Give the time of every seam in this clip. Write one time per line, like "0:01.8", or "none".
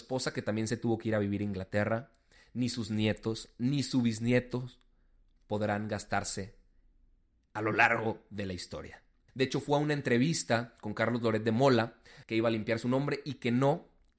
0:09.3
0:12.2